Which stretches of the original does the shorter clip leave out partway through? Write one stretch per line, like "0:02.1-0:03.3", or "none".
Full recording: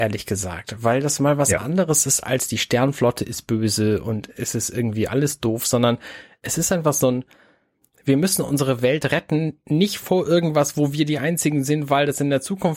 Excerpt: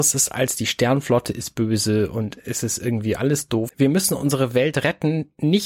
0:05.6-0:08.0